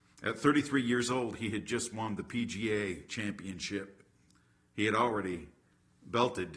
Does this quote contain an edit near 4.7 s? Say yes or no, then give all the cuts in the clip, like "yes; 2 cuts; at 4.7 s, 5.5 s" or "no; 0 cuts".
no; 0 cuts